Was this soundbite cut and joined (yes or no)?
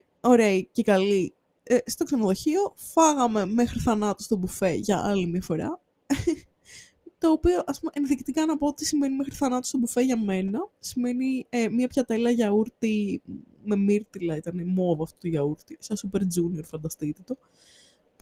no